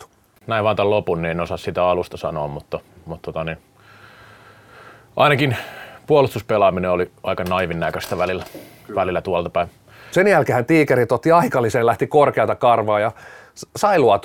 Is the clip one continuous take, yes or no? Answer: no